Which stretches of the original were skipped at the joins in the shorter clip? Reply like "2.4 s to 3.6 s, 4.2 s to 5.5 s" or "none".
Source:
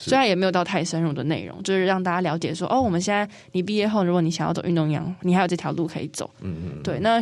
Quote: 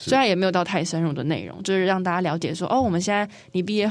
none